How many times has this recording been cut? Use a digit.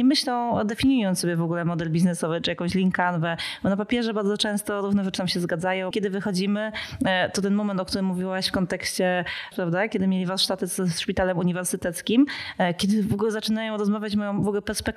2